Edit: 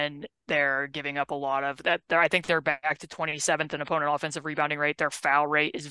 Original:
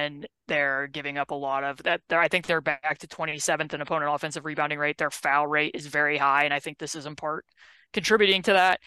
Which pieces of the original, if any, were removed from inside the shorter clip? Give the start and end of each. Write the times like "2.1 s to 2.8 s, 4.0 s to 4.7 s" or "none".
none